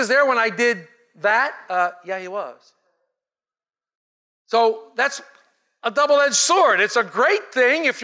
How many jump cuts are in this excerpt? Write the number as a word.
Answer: zero